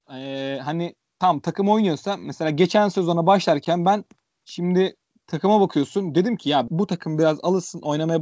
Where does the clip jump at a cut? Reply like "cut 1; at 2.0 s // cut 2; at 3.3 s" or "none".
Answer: cut 1; at 6.7 s